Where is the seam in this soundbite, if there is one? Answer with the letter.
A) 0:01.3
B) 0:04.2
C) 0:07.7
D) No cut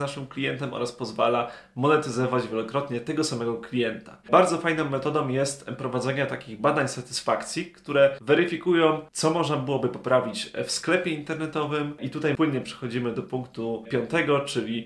B